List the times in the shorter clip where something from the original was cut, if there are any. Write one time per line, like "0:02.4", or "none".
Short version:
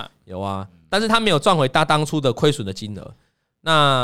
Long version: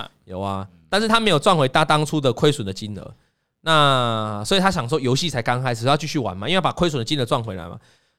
none